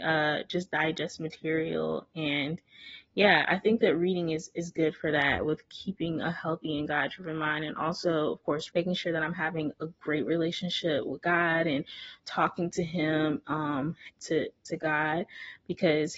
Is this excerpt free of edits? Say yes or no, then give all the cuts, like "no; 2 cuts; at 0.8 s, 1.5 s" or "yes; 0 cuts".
no; 2 cuts; at 8.7 s, 14.1 s